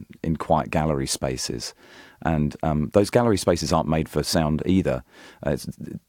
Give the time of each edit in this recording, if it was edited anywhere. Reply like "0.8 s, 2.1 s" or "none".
none